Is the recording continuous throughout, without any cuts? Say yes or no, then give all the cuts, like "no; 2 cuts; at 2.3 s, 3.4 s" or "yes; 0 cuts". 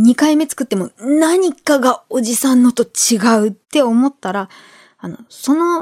no; 1 cut; at 3.6 s